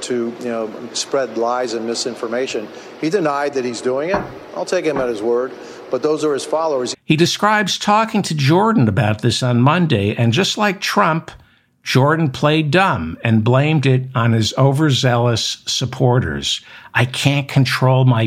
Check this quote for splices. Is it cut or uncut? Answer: cut